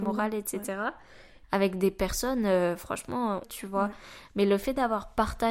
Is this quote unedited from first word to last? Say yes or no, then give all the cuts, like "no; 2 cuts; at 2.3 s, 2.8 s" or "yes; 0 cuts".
no; 2 cuts; at 1.4 s, 3.4 s